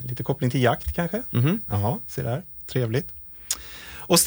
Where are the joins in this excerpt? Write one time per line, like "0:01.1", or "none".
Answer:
none